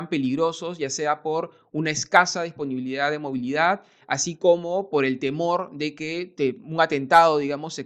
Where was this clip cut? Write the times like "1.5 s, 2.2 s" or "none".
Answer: none